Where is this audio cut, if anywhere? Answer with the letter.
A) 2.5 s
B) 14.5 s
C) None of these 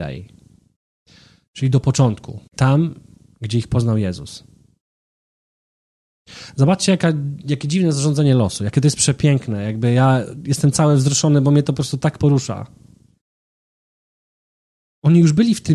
A